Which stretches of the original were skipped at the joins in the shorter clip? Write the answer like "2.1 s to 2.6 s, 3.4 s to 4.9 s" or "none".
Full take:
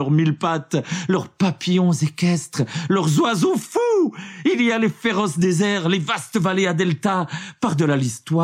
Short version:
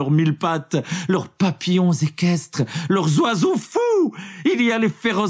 none